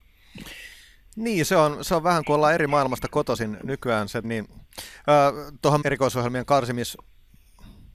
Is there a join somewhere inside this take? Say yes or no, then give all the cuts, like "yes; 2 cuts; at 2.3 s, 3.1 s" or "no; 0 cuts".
yes; 2 cuts; at 4.2 s, 5.8 s